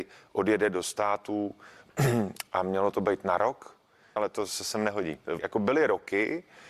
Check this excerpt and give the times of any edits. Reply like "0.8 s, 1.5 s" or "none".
4.2 s, 5.4 s